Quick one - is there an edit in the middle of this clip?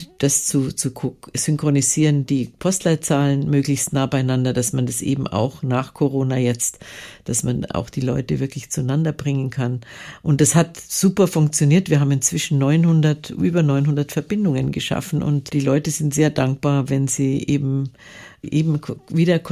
no; 0 cuts

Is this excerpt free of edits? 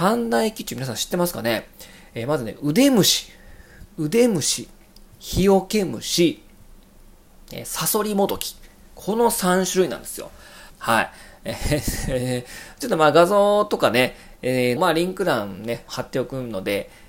no; 3 cuts; at 10.7 s, 14.8 s, 15.9 s

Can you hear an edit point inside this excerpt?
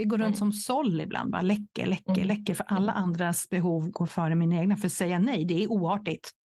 no; 0 cuts

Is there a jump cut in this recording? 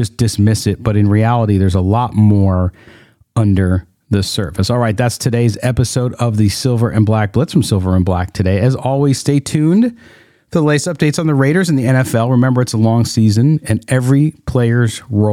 no; 0 cuts

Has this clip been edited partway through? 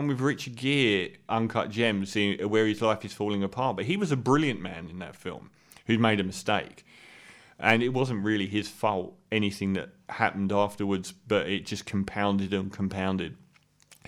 yes; 1 cut; at 1.3 s

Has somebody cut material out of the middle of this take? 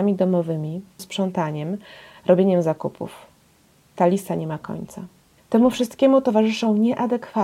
yes; 2 cuts; at 1.0 s, 5.4 s

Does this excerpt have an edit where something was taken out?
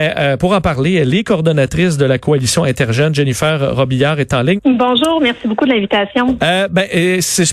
yes; 1 cut; at 4.6 s

